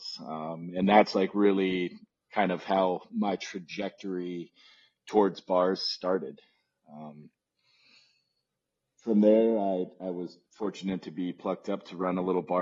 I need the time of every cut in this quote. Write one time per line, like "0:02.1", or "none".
none

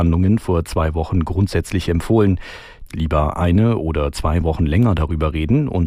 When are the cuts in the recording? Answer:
0:02.9

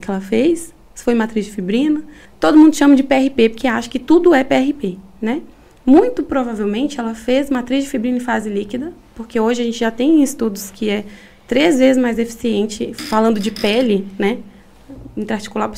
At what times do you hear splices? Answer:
0:02.2

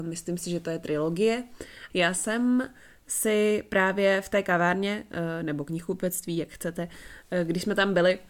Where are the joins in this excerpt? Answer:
0:01.9

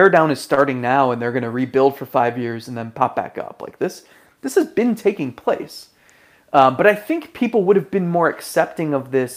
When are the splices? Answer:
none

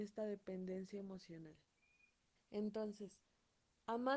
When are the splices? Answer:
0:02.4

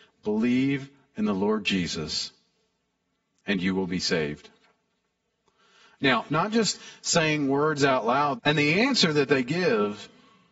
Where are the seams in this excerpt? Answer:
0:06.3
0:08.4

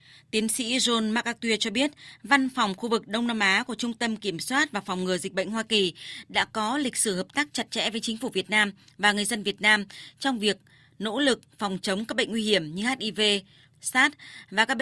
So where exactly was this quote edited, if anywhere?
0:13.7

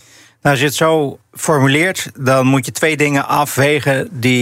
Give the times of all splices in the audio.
0:01.2

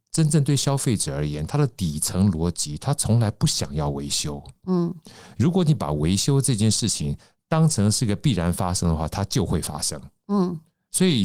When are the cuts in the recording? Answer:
none

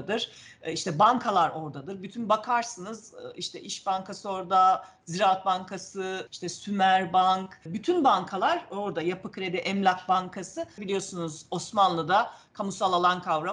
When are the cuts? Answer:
0:06.3
0:07.7
0:10.8

